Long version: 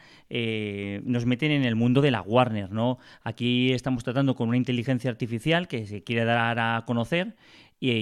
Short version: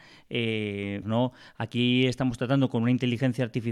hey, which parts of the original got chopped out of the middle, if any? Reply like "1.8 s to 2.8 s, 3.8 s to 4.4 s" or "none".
1.0 s to 2.7 s